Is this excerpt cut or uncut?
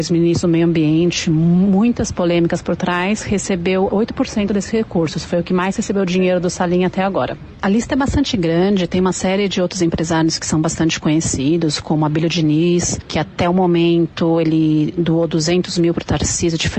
uncut